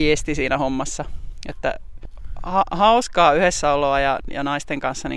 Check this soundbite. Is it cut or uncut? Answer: uncut